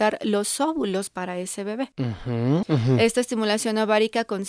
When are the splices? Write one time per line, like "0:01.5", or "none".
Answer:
0:02.6